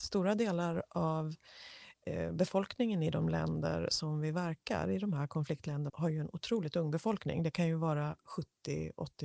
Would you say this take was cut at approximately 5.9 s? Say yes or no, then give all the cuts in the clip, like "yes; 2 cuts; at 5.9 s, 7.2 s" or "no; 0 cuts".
yes; 1 cut; at 5.9 s